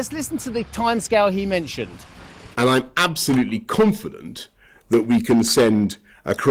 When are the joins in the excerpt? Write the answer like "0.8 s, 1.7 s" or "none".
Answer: 2.5 s